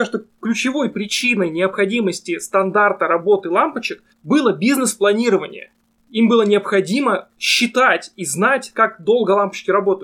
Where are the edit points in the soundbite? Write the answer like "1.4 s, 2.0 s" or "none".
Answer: 4.1 s

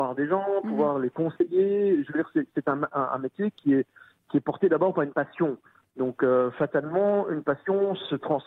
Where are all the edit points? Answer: none

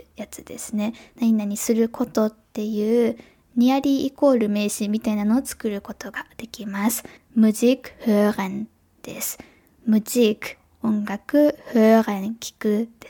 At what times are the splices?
7.2 s

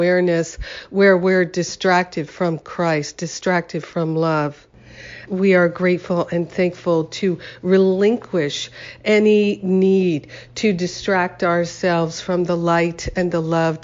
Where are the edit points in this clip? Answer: 5.3 s

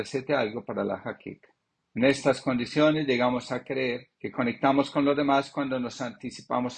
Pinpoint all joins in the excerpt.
1.8 s, 4.1 s

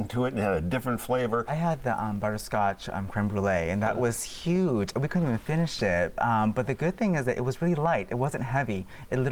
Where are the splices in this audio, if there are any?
none

